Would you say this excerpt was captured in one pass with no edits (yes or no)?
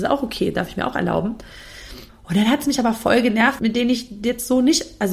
no